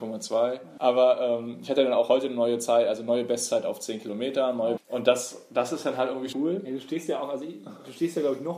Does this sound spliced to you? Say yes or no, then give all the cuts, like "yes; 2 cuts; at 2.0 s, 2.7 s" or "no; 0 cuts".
yes; 2 cuts; at 4.8 s, 6.3 s